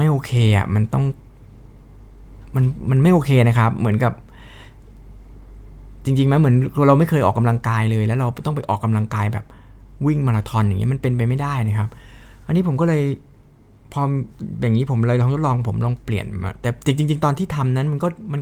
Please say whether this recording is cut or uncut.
uncut